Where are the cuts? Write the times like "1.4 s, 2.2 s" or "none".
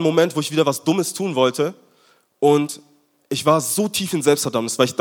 none